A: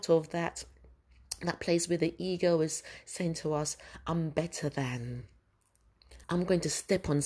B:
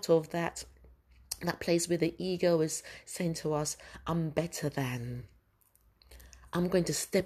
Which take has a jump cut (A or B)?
A